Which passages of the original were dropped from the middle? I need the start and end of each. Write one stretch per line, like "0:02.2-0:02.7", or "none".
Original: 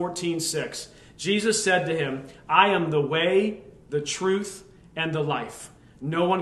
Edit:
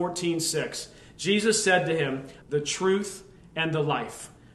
0:02.4-0:03.8

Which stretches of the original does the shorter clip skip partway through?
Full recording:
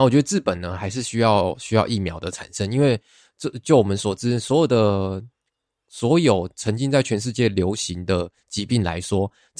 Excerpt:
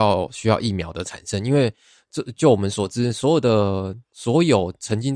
0:05.3-0:05.8

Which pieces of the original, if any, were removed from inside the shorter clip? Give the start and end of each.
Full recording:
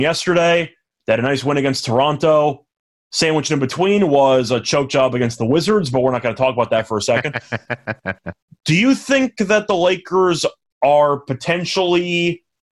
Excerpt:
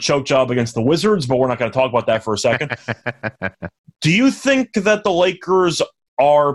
none

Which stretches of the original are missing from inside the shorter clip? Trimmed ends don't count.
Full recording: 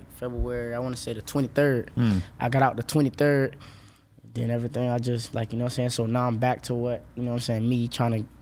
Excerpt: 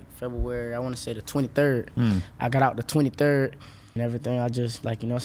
0:04.0-0:04.5

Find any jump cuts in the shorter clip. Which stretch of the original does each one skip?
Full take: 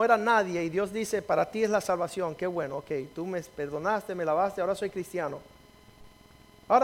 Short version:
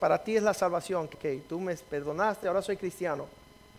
0:02.4-0:02.8
0:04.1-0:04.6

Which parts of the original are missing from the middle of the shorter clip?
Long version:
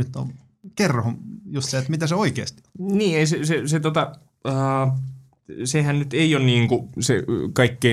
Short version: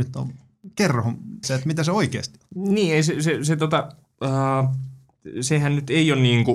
0:01.4-0:01.7

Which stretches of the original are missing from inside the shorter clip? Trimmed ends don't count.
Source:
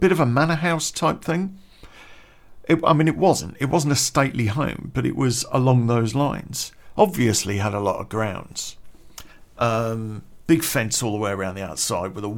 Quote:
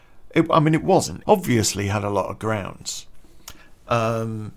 0:03.6-0:06.9

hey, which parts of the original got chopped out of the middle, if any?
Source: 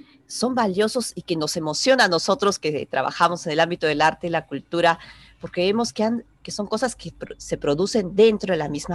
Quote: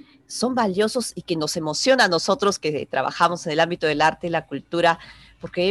none

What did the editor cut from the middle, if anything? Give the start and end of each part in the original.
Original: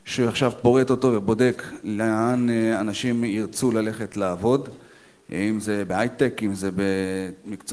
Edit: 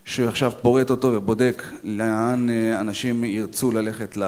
none

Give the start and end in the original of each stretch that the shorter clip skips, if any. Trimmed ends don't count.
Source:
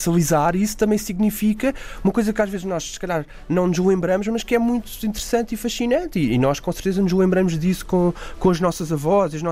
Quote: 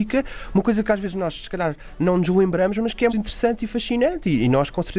0:04.6-0:05.0

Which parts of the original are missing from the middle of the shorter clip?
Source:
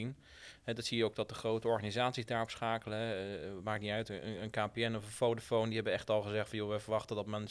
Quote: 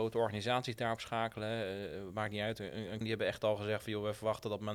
0:04.5-0:05.7

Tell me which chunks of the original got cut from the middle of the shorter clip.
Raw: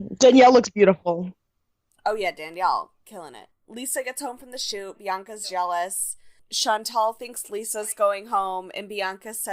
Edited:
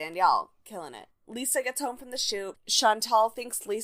0:05.0-0:06.4

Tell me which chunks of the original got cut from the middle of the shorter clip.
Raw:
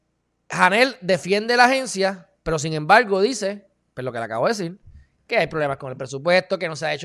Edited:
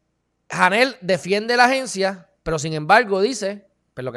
none

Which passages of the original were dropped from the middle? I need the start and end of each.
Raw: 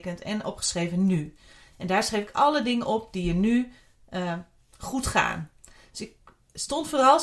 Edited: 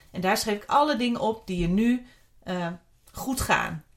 none

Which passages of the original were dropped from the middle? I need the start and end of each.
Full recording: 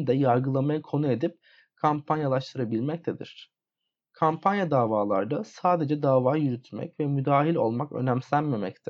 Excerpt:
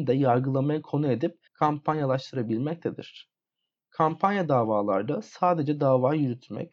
0:01.5-0:01.7

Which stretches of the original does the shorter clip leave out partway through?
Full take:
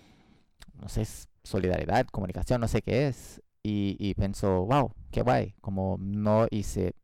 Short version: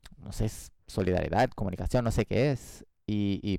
none

